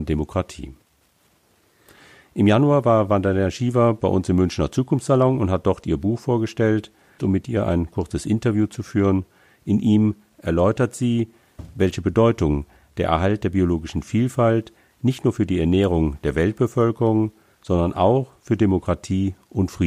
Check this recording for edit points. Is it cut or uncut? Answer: cut